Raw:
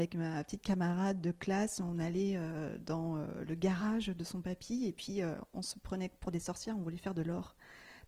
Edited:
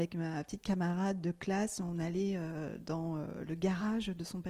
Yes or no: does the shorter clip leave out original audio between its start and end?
no